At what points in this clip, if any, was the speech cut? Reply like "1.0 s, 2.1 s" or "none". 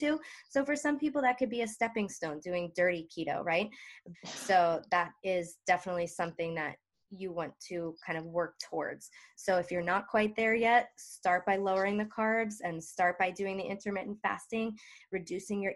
4.1 s